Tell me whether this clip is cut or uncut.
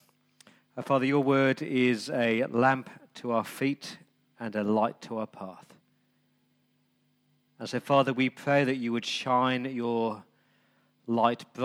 uncut